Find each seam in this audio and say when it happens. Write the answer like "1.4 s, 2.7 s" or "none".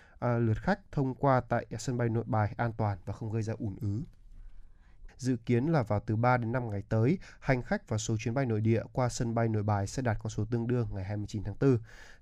5.1 s